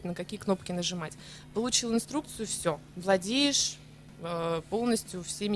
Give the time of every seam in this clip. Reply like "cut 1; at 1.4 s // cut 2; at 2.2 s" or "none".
none